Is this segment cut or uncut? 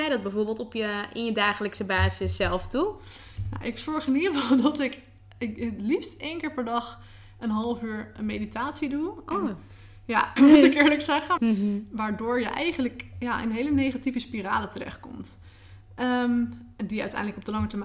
cut